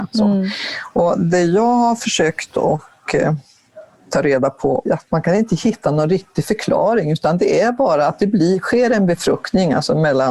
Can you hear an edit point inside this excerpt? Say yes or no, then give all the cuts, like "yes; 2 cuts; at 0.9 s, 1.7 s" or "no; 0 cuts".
yes; 1 cut; at 4.9 s